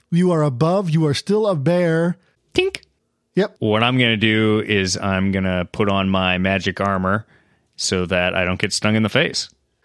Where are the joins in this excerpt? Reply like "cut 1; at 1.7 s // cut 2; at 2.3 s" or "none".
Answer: cut 1; at 2.3 s // cut 2; at 3.6 s